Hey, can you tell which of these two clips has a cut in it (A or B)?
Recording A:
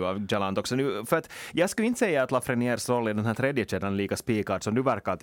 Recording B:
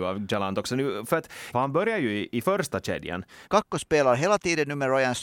B